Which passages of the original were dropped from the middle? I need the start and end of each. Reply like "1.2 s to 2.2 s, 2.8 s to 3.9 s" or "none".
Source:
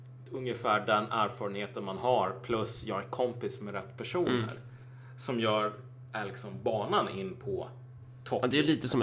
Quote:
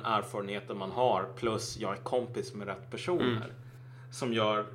none